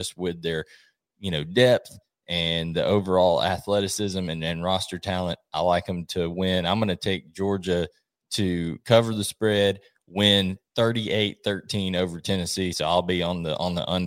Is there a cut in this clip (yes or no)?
no